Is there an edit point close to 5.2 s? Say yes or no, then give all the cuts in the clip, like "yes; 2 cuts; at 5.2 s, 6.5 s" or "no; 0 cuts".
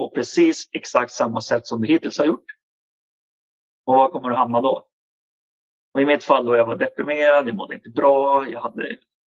no; 0 cuts